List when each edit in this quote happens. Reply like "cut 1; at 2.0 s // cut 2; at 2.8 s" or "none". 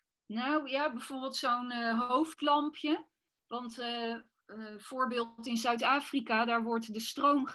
cut 1; at 4.4 s